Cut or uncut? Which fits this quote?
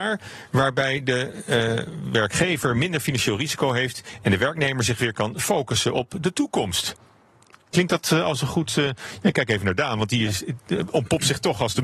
uncut